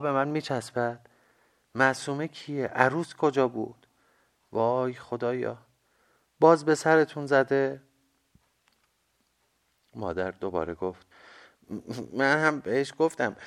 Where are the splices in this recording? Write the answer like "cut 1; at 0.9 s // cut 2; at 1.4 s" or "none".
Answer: none